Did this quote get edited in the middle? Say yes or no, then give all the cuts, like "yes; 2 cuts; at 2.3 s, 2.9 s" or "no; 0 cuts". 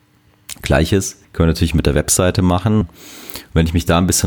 yes; 2 cuts; at 1.2 s, 2.8 s